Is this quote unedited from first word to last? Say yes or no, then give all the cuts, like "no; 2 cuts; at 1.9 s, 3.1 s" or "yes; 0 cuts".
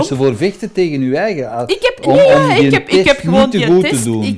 yes; 0 cuts